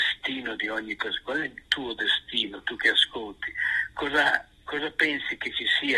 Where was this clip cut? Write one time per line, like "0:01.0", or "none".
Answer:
none